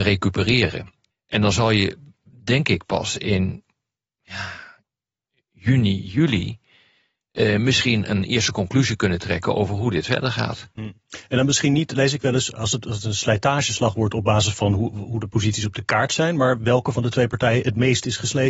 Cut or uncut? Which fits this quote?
cut